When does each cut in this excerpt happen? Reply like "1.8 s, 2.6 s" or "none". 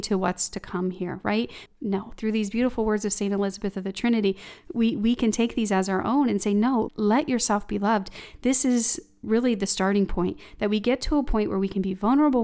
1.7 s, 6.9 s